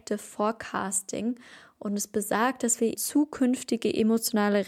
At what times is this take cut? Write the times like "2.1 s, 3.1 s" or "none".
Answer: 2.9 s